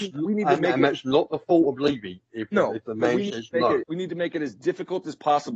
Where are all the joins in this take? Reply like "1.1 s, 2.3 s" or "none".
2.5 s, 3.8 s